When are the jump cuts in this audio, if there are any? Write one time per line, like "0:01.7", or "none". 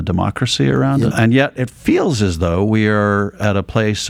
0:01.1